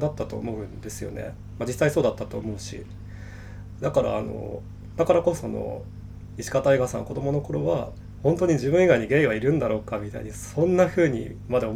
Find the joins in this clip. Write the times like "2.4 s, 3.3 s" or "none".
5.4 s